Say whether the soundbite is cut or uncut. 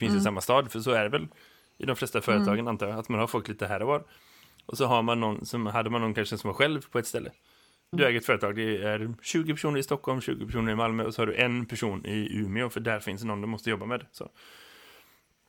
cut